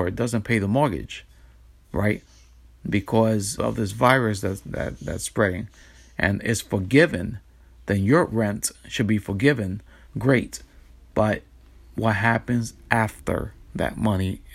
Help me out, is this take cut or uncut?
cut